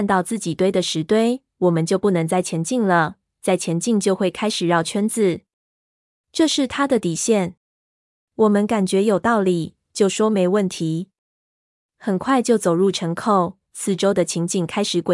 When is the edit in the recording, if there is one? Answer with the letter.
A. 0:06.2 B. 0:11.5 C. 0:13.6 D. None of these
C